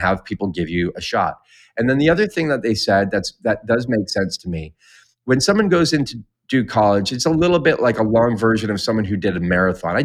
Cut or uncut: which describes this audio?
uncut